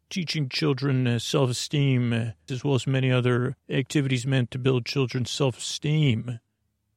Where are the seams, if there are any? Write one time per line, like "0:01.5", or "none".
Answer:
0:02.5
0:03.6